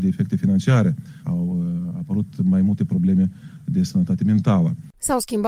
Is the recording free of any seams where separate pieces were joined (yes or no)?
no